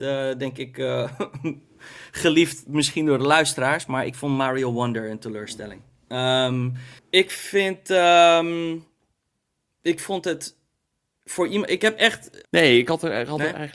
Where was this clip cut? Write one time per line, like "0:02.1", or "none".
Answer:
0:07.0
0:12.5